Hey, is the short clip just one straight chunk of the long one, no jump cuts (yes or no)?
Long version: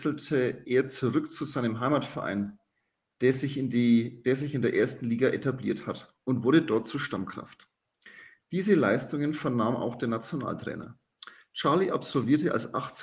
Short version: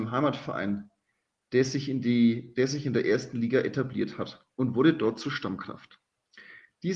yes